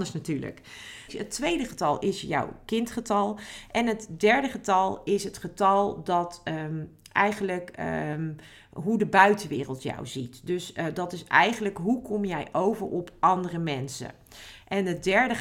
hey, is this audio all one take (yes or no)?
no